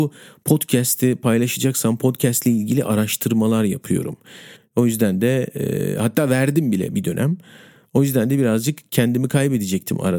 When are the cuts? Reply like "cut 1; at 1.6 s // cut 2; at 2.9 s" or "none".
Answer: cut 1; at 4.6 s